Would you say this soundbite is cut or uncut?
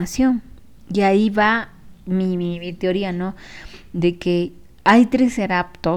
uncut